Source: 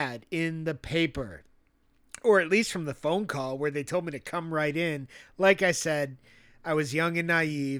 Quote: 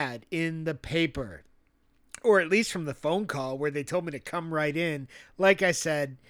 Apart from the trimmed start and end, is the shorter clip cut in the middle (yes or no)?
no